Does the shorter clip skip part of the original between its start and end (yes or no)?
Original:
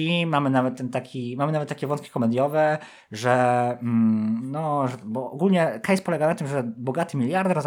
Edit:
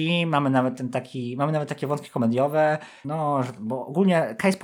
yes